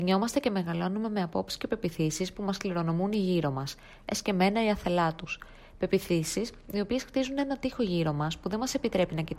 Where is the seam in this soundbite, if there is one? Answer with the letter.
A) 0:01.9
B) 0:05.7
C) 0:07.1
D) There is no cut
D